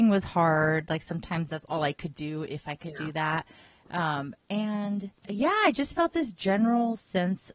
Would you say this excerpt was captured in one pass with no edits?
no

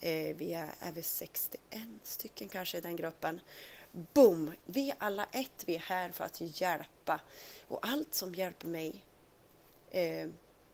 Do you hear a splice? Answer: yes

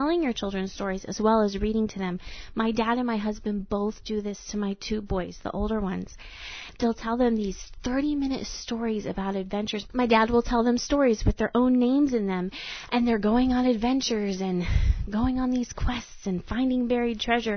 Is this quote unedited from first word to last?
yes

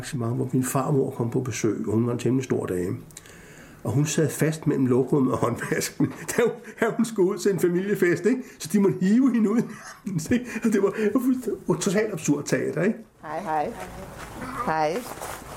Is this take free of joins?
yes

